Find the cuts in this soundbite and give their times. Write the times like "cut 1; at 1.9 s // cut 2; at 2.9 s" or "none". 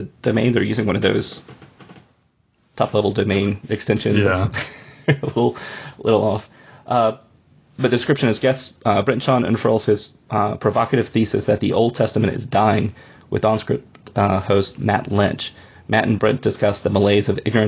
none